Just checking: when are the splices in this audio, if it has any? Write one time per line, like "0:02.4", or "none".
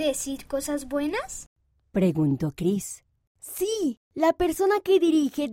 none